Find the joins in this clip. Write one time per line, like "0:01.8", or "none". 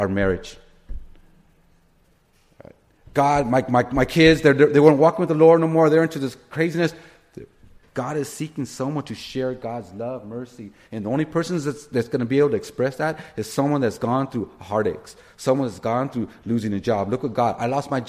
0:07.8